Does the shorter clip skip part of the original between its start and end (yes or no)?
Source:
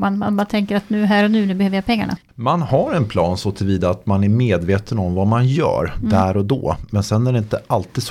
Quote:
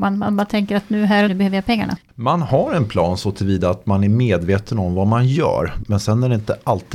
yes